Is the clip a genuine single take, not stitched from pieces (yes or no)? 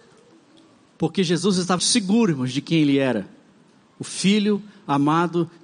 no